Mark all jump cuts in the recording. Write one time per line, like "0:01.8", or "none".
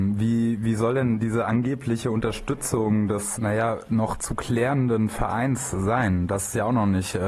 0:03.4